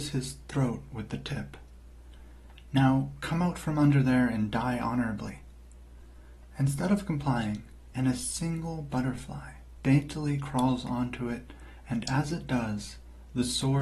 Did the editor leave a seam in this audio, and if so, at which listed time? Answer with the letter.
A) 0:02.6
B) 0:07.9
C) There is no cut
B